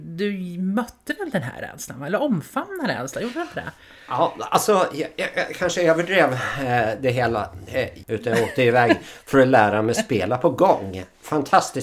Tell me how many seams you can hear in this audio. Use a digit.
1